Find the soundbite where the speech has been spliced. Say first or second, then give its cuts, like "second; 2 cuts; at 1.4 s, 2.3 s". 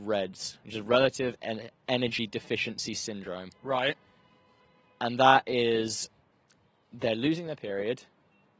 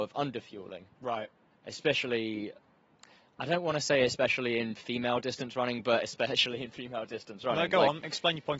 second; 1 cut; at 0.9 s